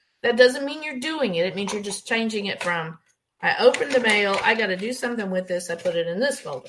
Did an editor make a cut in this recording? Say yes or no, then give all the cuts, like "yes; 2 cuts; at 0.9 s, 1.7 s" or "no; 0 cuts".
no; 0 cuts